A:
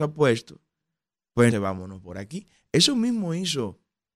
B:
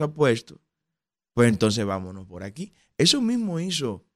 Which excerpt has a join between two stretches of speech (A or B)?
A